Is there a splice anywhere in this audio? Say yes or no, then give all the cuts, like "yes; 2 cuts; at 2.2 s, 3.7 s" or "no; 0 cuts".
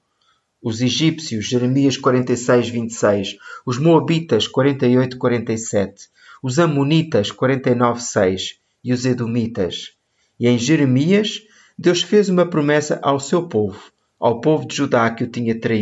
no; 0 cuts